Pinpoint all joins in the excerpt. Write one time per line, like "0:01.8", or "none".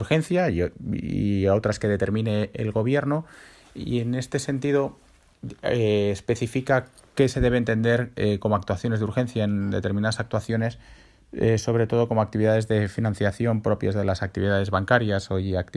none